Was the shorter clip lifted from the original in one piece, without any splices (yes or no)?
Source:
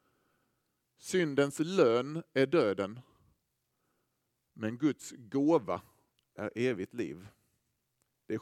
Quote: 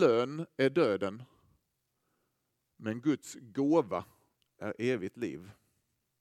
yes